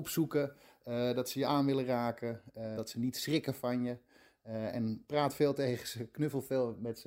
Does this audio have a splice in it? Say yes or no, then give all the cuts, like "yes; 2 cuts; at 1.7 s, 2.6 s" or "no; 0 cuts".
yes; 1 cut; at 2.8 s